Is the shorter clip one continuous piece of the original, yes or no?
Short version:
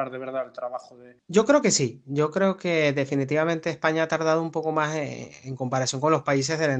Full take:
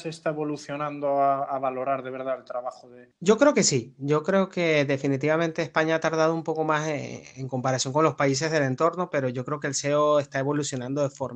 yes